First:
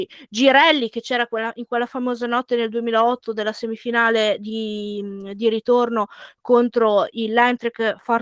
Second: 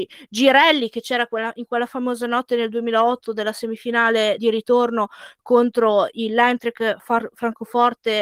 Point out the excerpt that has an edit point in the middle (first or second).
second